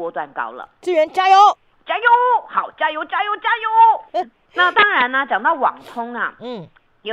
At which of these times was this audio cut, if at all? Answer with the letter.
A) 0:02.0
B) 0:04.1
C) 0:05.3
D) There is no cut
B